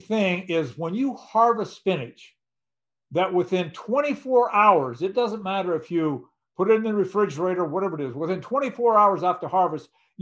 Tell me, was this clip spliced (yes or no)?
no